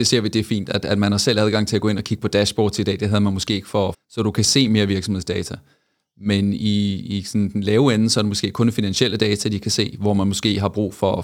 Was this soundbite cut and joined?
yes; 1 cut; at 3.9 s

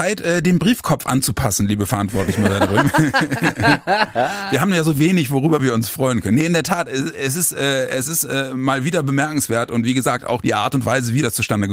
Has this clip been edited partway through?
yes; 1 cut; at 10.4 s

